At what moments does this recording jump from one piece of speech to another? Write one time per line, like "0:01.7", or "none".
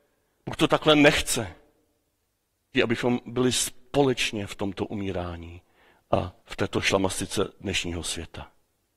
0:02.7
0:06.4